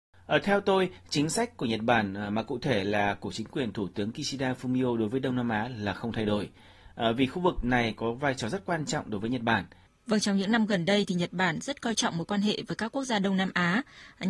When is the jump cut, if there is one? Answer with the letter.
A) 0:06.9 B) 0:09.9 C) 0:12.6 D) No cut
B